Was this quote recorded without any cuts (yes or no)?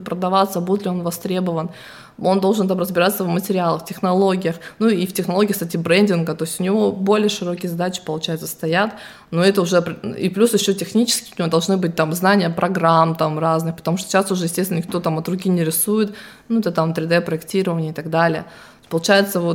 yes